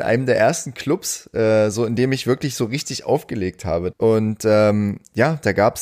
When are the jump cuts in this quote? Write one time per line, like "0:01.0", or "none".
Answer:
0:03.9